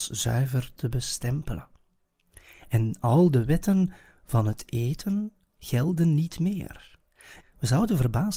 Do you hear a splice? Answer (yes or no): yes